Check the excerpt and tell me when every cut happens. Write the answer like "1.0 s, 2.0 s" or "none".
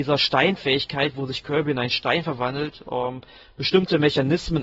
none